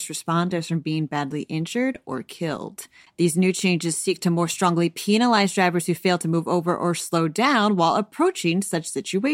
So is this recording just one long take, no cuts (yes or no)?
yes